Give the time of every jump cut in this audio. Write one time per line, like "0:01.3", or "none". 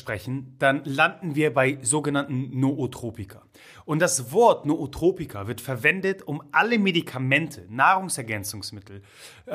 none

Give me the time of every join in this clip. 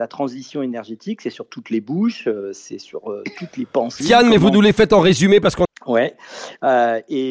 0:04.0
0:05.7

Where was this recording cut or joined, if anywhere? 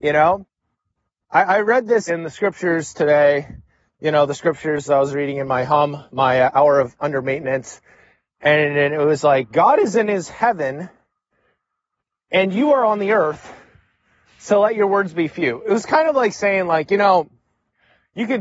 0:02.1

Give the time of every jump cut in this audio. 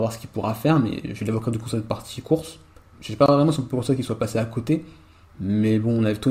0:02.9

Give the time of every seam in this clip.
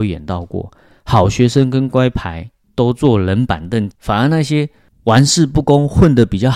0:01.9
0:03.9

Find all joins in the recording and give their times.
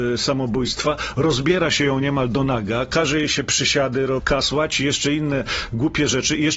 0:04.2

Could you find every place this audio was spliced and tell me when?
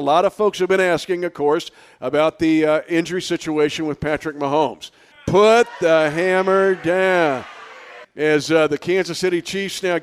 0:05.1
0:08.0

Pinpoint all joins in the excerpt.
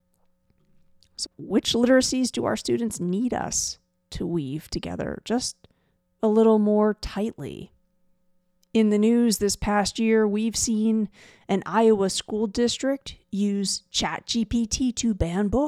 0:01.2

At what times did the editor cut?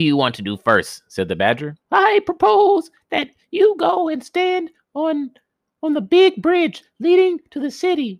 0:01.8

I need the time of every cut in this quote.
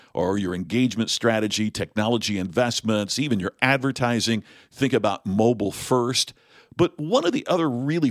none

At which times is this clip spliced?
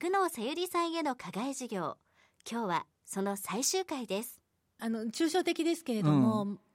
0:04.8

